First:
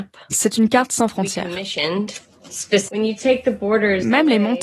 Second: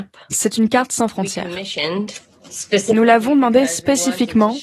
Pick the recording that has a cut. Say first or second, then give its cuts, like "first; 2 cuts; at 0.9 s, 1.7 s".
first; 1 cut; at 2.9 s